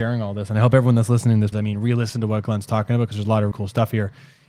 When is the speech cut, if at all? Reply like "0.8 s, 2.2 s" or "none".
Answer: 1.5 s, 3.5 s

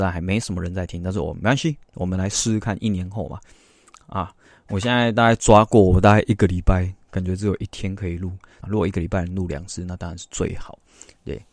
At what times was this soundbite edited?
8.6 s

